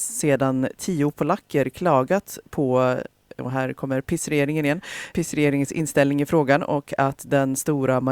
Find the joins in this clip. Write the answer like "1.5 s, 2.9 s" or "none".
5.1 s